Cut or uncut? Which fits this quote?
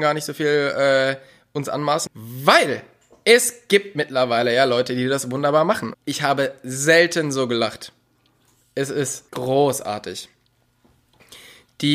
cut